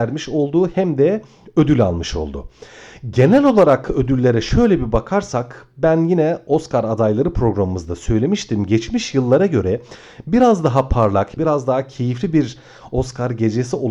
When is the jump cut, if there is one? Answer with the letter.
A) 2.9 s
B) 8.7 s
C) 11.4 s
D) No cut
C